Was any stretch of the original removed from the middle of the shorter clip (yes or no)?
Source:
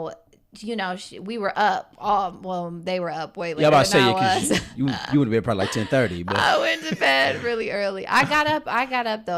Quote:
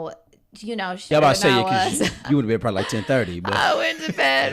yes